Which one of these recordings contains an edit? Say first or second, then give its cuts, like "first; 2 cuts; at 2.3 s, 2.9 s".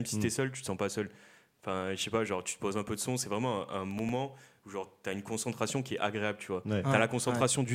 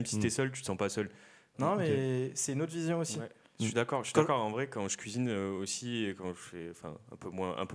second; 1 cut; at 1.5 s